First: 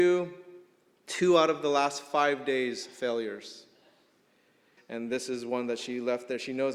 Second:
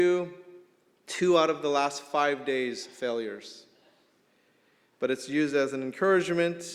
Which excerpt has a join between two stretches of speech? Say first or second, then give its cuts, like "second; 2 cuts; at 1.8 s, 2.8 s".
first; 1 cut; at 4.8 s